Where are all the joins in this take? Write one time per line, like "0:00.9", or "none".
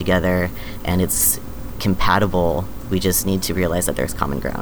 0:01.8